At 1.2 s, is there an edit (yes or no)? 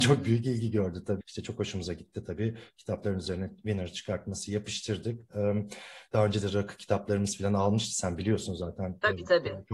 yes